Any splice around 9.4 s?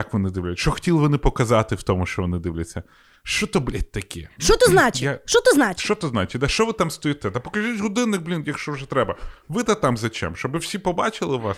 no; 0 cuts

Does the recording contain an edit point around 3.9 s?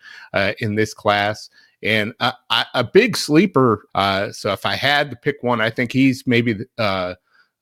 yes; 1 cut; at 3.9 s

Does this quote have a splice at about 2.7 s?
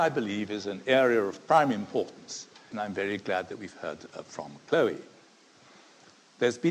yes; 1 cut; at 2.7 s

